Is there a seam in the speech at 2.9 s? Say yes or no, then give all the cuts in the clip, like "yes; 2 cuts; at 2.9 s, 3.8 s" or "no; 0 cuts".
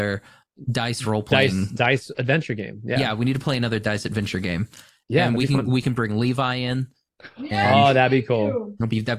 no; 0 cuts